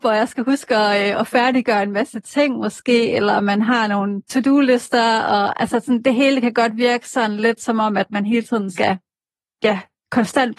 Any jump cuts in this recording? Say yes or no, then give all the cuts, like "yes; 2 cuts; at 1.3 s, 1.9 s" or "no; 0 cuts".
no; 0 cuts